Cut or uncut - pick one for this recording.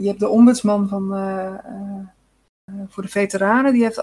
uncut